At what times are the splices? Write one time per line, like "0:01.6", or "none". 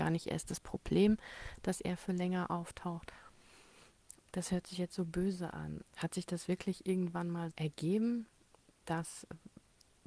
0:04.2
0:05.8
0:07.5